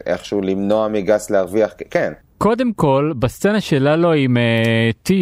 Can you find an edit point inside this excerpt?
yes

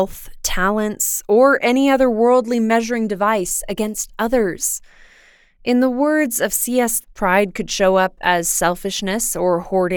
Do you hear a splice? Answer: yes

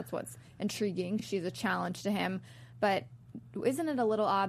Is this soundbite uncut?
yes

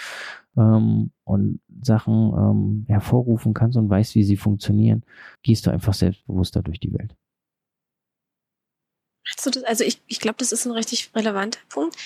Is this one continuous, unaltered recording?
no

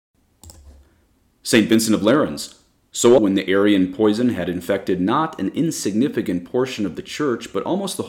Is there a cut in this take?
yes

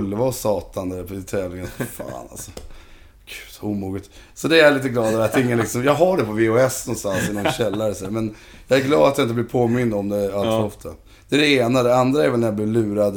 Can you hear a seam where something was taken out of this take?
no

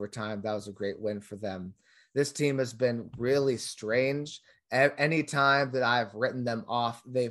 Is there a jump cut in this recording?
no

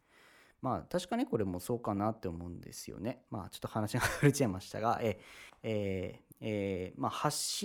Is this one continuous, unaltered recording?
no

